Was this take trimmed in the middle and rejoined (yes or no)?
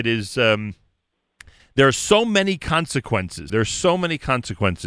yes